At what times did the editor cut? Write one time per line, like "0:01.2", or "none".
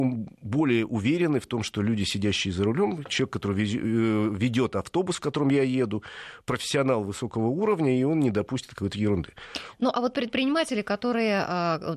none